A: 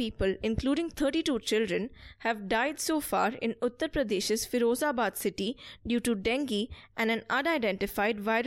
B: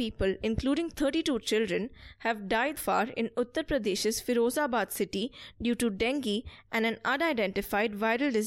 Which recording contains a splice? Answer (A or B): B